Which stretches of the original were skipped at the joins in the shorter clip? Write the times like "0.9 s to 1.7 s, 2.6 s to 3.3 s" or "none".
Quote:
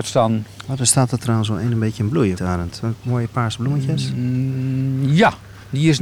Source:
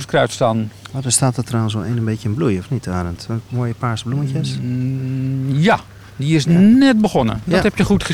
2.6 s to 2.8 s

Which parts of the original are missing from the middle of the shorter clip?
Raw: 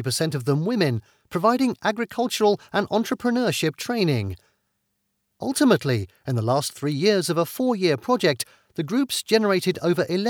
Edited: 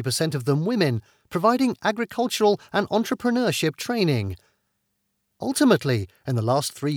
none

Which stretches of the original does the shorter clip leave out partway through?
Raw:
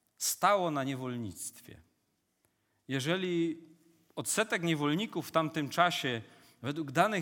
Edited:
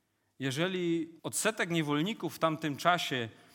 3.7 s to 4.1 s

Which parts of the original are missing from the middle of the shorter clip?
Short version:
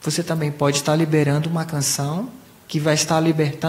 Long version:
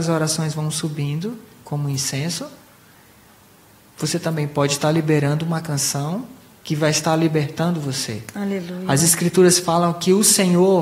none

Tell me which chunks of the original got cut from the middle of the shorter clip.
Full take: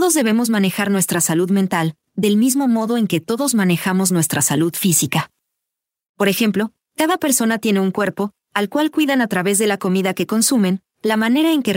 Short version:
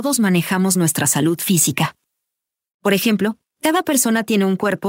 none

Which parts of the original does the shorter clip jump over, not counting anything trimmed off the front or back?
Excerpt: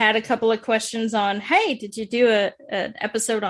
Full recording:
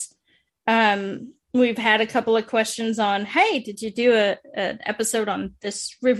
none

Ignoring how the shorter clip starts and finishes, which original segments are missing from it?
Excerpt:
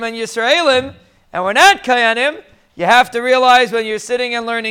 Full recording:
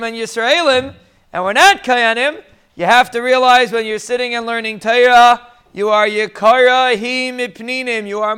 none

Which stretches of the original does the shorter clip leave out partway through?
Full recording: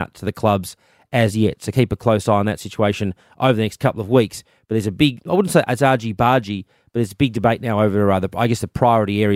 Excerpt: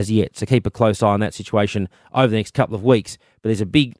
none

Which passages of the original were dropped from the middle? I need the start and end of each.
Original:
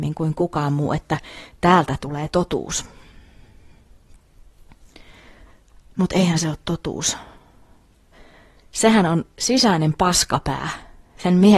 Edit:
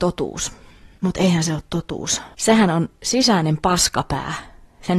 3.3 s to 5.9 s, 7.3 s to 8.7 s

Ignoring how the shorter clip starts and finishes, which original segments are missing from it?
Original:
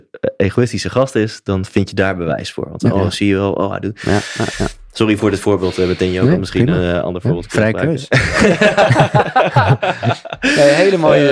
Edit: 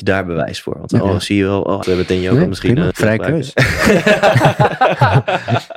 3.7 s to 5.7 s, 6.8 s to 7.5 s

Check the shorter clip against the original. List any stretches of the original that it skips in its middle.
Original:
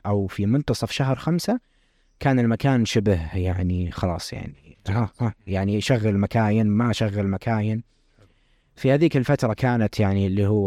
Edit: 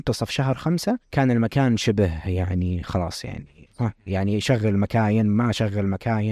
1.6 s to 2.1 s, 4.8 s to 5.1 s

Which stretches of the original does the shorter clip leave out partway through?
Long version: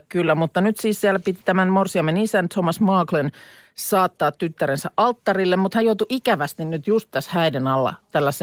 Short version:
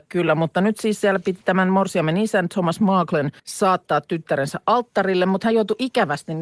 3.4 s to 3.7 s

